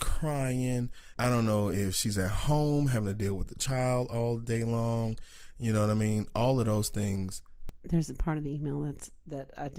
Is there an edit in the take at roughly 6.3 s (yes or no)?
no